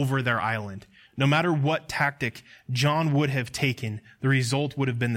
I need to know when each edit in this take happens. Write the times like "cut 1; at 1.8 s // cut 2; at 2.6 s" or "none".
cut 1; at 1.1 s